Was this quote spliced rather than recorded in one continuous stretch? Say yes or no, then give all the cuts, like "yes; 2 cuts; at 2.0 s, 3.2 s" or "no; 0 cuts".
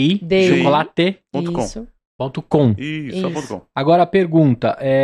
no; 0 cuts